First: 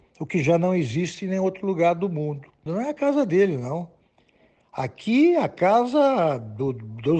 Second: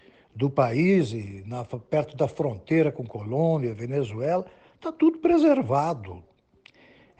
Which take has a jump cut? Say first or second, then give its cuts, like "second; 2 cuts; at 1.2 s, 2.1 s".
first; 1 cut; at 2.7 s